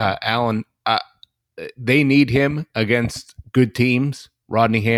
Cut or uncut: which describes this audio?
uncut